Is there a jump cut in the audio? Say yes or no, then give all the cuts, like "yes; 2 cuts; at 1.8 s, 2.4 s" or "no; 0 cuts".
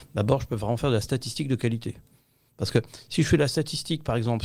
no; 0 cuts